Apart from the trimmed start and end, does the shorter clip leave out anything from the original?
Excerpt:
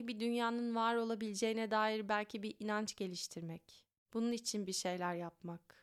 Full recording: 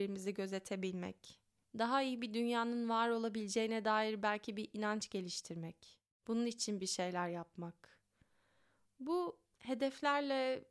no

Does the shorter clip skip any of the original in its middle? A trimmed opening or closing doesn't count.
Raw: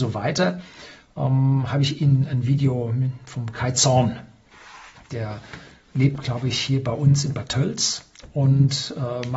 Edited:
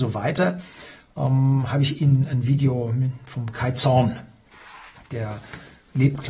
no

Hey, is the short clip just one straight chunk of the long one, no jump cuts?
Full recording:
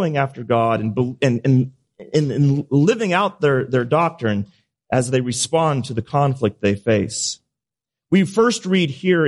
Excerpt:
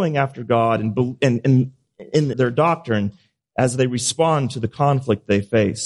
no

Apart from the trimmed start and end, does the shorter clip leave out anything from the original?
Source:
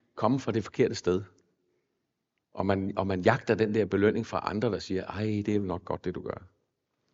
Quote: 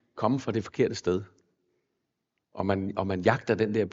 no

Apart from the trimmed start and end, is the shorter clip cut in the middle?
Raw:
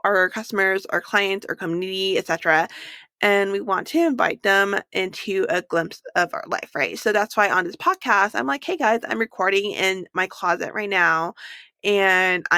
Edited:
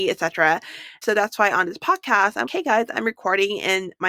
yes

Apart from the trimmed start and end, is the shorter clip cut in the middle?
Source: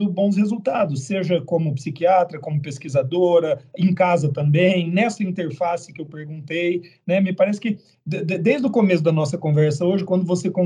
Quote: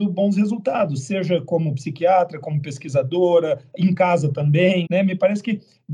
yes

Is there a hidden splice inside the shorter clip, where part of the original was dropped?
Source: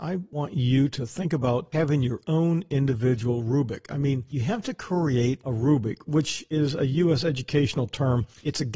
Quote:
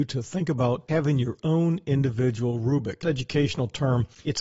yes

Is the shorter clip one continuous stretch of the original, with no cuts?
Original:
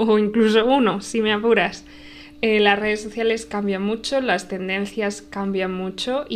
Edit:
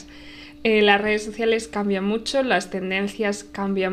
yes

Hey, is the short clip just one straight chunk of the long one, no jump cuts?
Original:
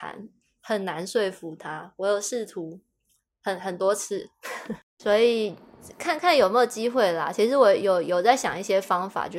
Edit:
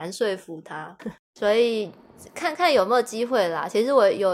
no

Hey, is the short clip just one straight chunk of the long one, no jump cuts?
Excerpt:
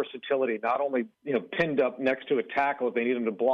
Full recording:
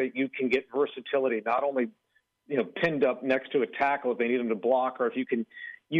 no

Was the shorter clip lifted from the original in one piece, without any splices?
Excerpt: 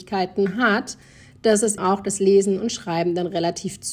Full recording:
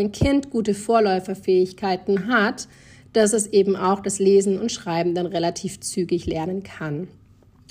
no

